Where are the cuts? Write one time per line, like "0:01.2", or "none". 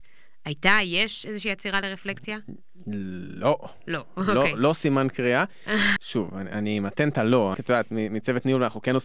0:06.0
0:07.5